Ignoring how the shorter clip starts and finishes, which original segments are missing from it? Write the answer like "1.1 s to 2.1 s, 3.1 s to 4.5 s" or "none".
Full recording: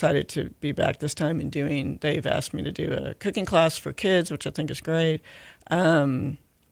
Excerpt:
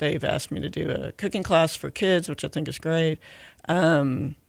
none